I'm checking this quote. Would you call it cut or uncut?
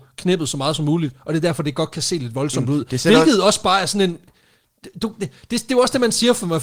uncut